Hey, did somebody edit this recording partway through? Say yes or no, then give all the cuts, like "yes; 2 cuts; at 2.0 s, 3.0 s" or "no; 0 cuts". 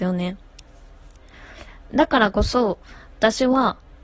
no; 0 cuts